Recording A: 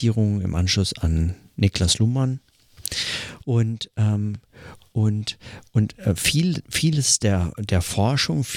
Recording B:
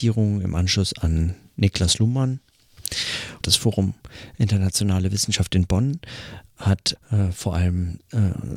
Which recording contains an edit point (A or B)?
B